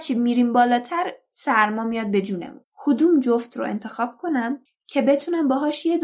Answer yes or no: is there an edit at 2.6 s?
yes